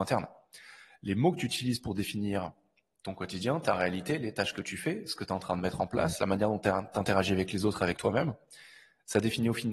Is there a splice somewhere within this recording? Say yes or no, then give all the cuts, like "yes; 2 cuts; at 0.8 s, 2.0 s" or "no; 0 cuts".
no; 0 cuts